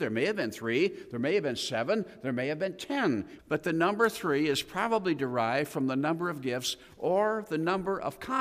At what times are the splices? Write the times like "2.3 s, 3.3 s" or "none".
3.4 s